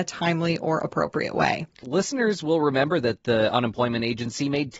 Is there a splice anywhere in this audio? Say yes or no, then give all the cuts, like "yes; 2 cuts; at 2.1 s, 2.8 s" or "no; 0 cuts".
yes; 1 cut; at 1.8 s